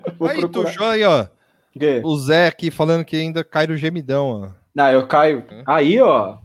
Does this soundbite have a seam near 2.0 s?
yes; 2 cuts; at 2.0 s, 5.5 s

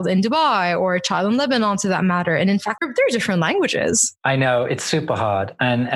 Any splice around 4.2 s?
no; 1 cut; at 2.8 s

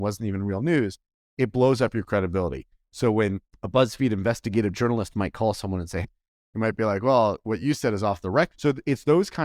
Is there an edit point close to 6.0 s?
yes; 2 cuts; at 6.0 s, 8.5 s

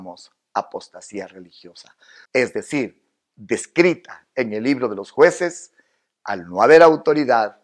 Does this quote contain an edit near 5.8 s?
no; 1 cut; at 2.3 s

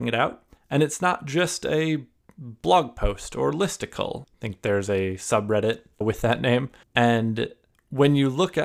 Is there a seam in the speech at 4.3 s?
yes; 1 cut; at 4.3 s

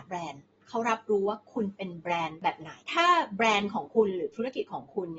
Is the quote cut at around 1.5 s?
no; 1 cut; at 2.8 s

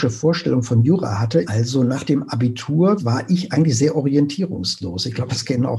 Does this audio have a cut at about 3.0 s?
yes; 2 cuts; at 1.4 s, 3.0 s

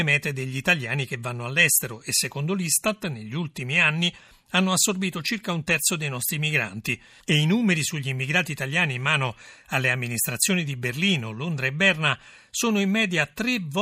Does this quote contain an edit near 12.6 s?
no; 1 cut; at 7.2 s

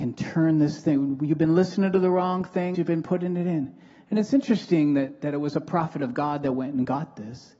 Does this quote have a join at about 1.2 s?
no; 1 cut; at 2.7 s

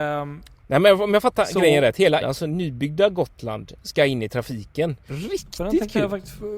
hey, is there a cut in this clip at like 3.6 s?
no; 2 cuts; at 2.2 s, 5.1 s

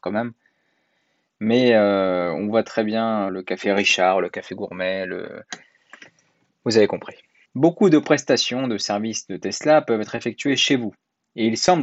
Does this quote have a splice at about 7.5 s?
yes; 2 cuts; at 3.3 s, 7.5 s

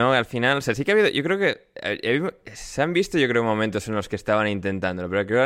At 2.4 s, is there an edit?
no; 0 cuts

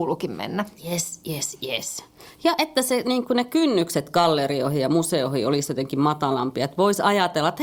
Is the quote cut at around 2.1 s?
no; 0 cuts

